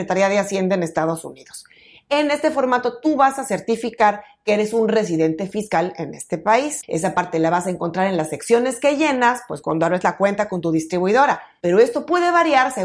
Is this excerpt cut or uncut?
cut